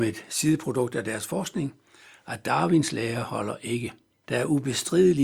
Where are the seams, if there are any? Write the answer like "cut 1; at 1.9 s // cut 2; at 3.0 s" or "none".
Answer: cut 1; at 4.2 s